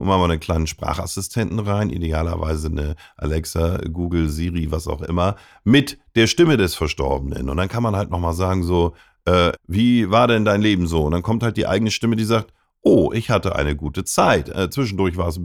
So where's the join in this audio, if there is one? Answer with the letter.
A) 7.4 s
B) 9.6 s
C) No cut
B